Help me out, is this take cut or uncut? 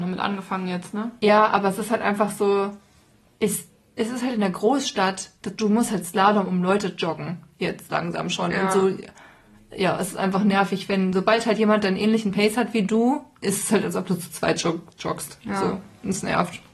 uncut